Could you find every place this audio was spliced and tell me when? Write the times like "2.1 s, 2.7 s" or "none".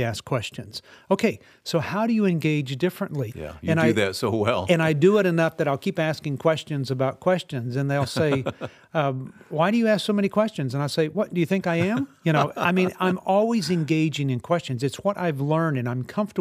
3.3 s